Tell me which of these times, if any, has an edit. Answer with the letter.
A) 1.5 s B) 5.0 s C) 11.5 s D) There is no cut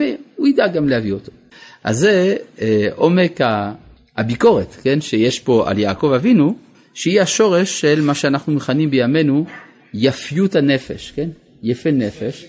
A